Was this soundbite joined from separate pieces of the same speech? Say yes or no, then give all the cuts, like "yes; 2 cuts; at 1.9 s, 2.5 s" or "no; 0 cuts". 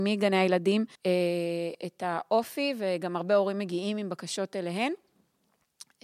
yes; 1 cut; at 1.0 s